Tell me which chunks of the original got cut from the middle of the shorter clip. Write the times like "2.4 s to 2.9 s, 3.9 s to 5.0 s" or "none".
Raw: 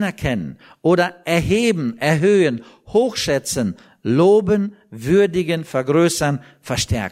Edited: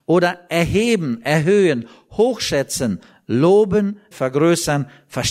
4.9 s to 5.6 s